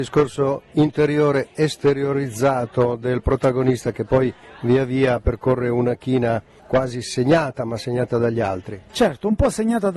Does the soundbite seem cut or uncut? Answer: uncut